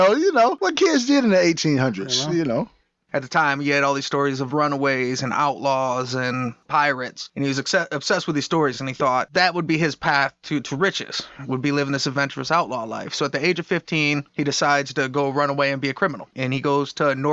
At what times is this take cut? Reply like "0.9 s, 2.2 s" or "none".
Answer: none